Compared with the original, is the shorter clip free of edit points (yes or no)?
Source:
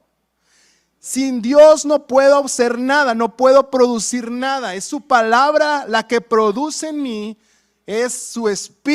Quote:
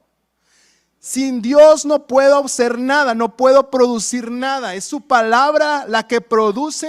yes